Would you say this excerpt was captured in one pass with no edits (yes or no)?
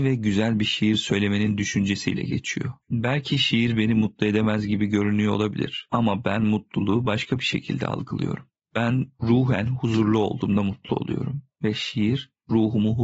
no